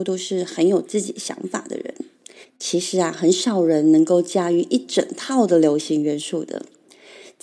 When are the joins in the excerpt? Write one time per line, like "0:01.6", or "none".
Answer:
0:02.4